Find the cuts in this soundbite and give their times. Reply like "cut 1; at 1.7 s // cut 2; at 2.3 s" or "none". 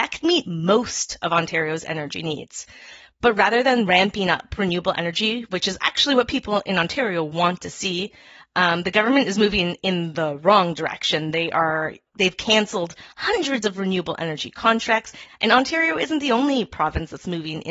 cut 1; at 12.1 s // cut 2; at 15.3 s